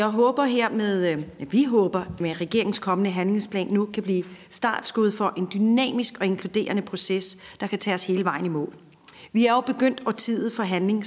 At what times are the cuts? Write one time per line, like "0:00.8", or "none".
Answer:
0:02.2